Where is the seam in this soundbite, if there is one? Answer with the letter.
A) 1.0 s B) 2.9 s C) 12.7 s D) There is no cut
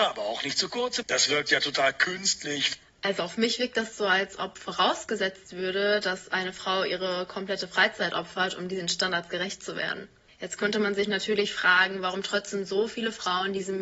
A